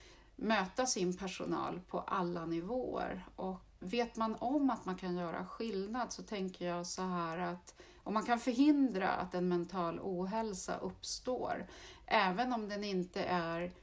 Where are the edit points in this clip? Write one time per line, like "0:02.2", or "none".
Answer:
0:03.8